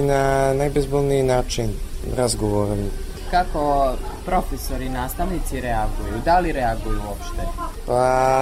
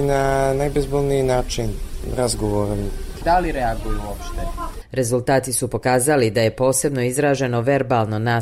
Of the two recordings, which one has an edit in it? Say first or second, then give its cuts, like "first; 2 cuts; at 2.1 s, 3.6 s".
second; 2 cuts; at 3.2 s, 4.8 s